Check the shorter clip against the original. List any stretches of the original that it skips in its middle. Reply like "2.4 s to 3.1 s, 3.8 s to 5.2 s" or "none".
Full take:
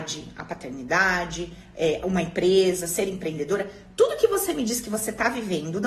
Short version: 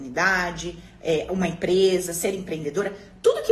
none